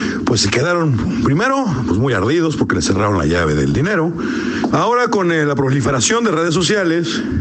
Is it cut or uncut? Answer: cut